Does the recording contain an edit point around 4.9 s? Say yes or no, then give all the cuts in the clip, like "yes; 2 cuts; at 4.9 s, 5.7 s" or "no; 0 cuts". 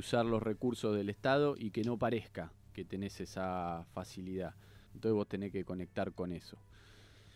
yes; 1 cut; at 4.9 s